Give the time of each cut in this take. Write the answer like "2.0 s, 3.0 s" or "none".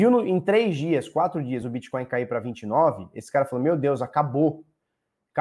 none